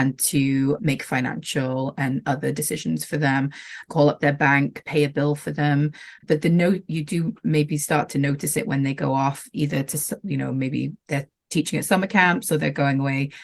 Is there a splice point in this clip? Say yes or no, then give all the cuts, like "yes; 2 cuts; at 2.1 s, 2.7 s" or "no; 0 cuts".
yes; 1 cut; at 6.2 s